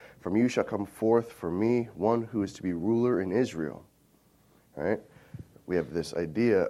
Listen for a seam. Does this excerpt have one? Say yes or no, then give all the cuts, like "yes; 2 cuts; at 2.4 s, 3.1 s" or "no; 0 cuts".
no; 0 cuts